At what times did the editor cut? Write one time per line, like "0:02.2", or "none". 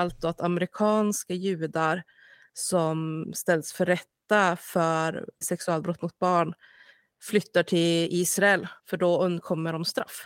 0:05.4
0:08.8